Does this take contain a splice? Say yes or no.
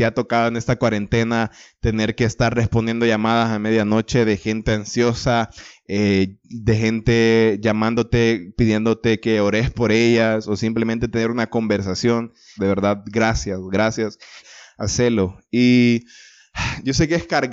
yes